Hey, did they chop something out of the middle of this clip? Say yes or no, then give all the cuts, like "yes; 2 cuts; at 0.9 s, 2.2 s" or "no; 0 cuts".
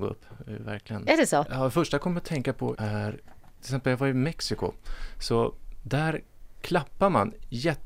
yes; 2 cuts; at 1.5 s, 2.8 s